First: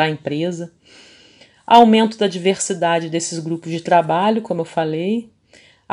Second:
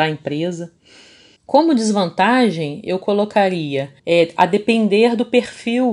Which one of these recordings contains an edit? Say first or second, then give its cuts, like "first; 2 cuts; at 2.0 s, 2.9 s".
second; 2 cuts; at 1.4 s, 4.0 s